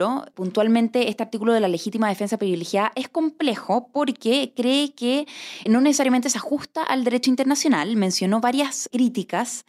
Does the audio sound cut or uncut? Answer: cut